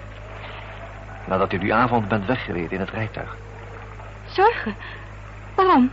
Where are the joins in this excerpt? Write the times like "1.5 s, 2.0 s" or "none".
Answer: none

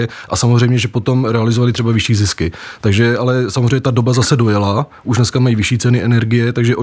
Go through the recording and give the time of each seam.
none

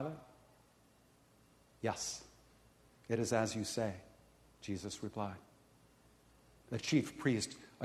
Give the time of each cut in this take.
none

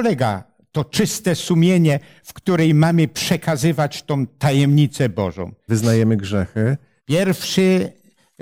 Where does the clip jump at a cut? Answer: 5.7 s, 7.0 s

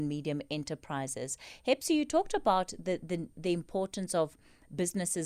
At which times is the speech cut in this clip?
none

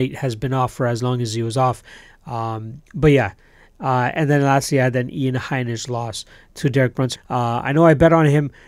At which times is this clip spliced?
2.9 s, 7.1 s

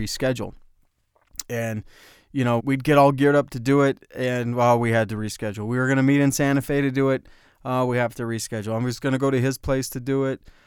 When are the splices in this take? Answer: 2.6 s

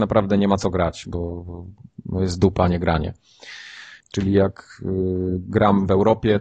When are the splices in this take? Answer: 4.0 s

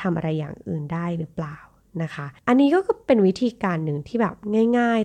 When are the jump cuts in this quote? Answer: none

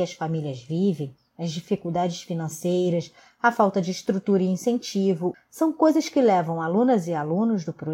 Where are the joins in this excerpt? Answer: 5.3 s

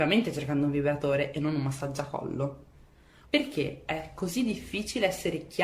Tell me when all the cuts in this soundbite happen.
3.2 s

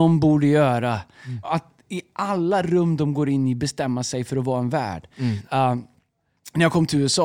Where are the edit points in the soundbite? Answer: 1.4 s, 5.4 s

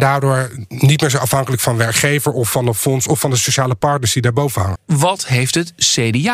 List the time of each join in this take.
4.7 s

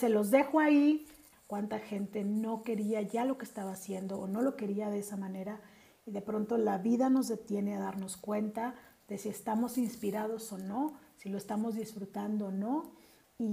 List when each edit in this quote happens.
1.3 s

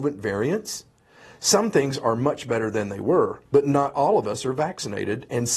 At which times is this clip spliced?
3.5 s

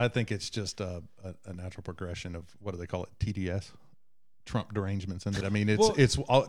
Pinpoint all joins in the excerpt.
5.4 s

